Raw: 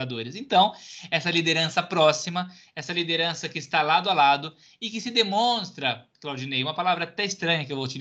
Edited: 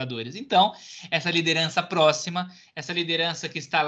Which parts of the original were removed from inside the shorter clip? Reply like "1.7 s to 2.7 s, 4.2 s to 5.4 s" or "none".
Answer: none